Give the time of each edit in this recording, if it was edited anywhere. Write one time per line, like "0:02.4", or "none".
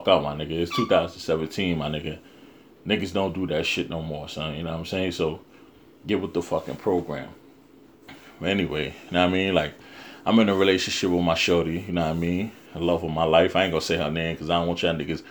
none